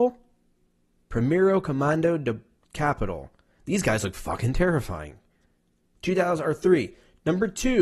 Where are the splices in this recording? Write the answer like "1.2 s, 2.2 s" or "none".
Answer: none